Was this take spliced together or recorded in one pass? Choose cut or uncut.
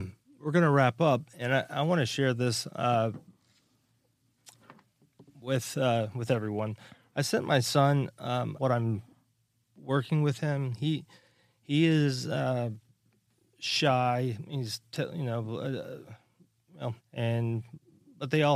cut